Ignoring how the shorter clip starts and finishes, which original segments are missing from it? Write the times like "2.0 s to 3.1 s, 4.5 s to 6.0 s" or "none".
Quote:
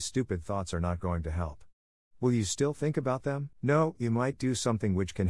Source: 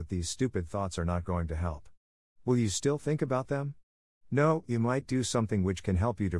3.8 s to 4.2 s